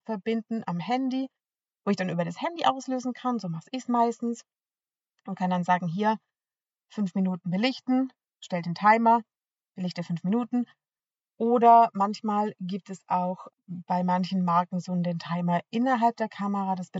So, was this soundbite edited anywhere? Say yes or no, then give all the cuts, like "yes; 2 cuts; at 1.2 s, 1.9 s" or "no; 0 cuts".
yes; 1 cut; at 13.5 s